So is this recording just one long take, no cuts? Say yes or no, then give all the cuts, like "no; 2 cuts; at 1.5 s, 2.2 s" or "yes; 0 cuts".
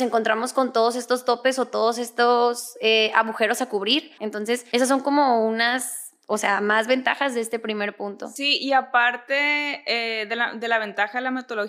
no; 1 cut; at 4.2 s